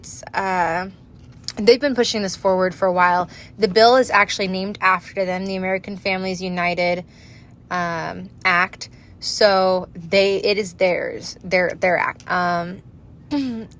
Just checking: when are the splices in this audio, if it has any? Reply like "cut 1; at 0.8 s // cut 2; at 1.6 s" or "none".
cut 1; at 10.4 s // cut 2; at 12.2 s